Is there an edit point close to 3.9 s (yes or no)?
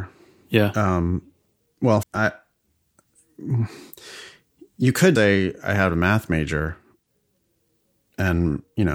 no